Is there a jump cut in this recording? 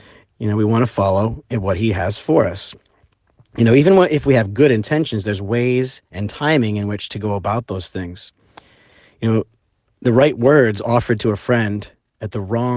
no; 0 cuts

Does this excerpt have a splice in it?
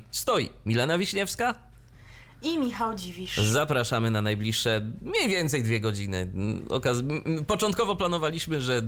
no; 0 cuts

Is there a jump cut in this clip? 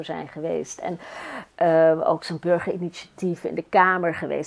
no; 0 cuts

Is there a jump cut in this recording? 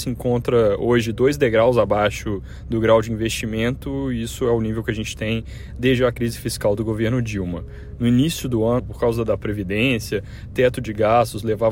yes; 1 cut; at 8.8 s

